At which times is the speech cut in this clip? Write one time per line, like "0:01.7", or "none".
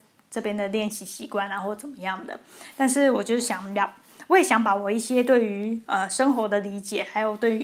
none